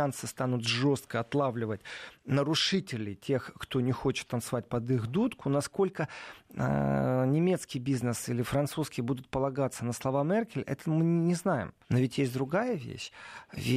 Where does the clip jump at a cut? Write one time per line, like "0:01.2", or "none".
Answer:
0:11.8